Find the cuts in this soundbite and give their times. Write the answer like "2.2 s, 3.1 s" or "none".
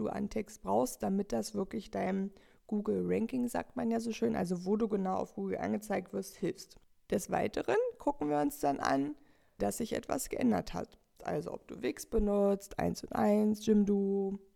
9.6 s, 11.2 s